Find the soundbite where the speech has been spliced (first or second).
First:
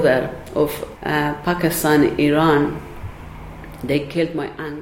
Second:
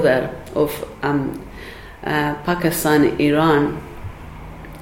first